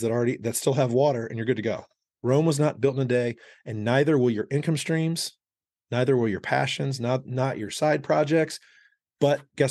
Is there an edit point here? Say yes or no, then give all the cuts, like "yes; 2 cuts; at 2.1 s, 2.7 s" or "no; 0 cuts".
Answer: yes; 1 cut; at 2.1 s